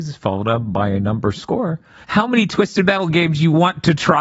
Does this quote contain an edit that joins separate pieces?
yes; 1 cut; at 2.0 s

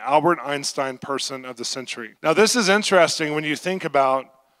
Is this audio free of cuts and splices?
no; 1 cut; at 2.2 s

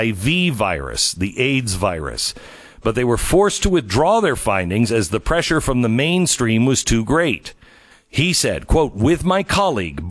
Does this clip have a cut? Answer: yes; 1 cut; at 7.9 s

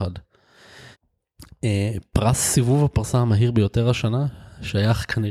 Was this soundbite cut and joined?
yes; 1 cut; at 0.9 s

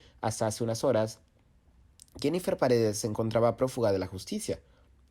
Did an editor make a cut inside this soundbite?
no; 0 cuts

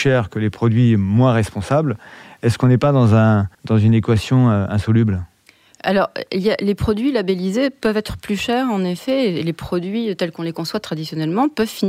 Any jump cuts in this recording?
yes; 1 cut; at 3.5 s

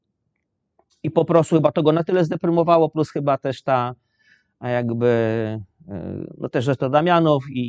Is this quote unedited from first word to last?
yes; 0 cuts

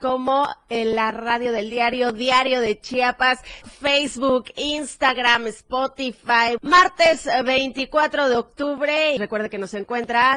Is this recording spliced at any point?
yes; 3 cuts; at 3.6 s, 6.6 s, 9.2 s

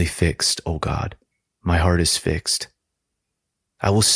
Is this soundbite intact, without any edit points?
yes; 0 cuts

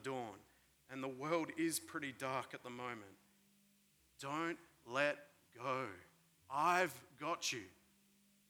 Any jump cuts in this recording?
yes; 2 cuts; at 4.0 s, 6.4 s

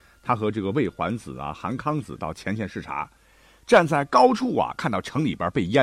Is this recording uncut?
yes; 0 cuts

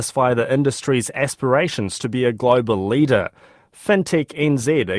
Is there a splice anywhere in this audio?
no; 0 cuts

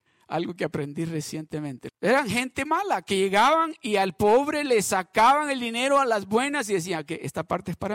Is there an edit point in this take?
yes; 1 cut; at 1.9 s

